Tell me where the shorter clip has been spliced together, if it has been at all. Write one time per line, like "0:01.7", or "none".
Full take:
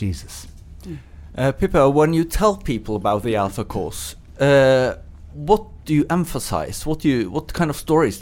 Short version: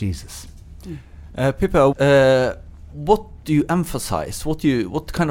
0:01.9